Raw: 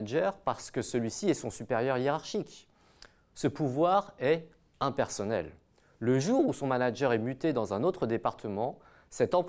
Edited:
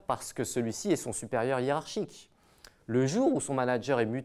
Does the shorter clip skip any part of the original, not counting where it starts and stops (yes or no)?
yes